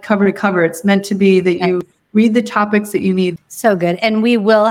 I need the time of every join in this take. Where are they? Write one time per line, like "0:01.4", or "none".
0:03.4